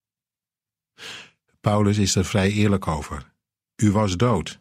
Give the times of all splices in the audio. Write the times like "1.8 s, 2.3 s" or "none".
none